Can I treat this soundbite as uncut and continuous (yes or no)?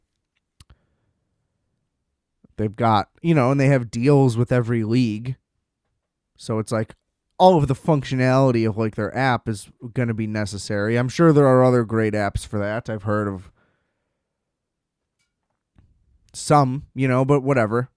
yes